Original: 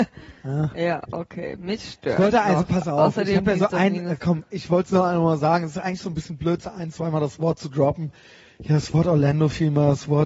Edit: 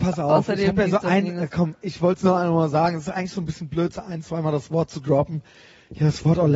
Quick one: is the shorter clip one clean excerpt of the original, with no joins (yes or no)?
yes